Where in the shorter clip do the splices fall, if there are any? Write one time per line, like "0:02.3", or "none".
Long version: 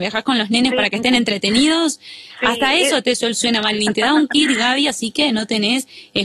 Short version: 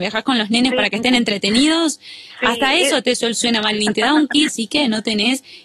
0:04.5

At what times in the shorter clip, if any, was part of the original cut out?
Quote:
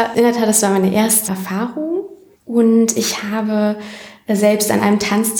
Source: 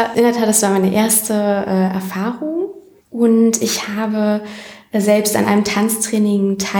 0:01.3

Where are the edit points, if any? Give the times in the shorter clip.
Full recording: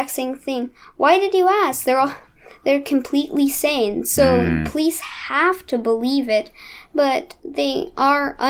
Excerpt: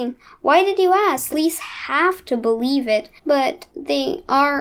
0:01.3
0:03.2

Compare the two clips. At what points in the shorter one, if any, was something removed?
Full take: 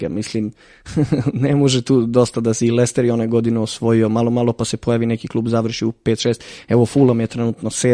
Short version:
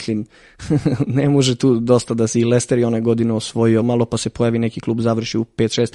0:03.8

